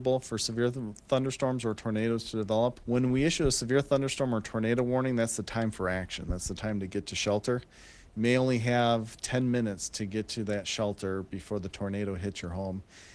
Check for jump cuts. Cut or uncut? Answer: cut